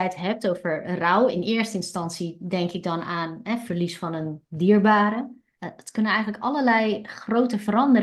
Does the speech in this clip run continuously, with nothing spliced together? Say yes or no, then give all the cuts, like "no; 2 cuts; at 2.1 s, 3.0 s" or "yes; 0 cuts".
no; 1 cut; at 5.6 s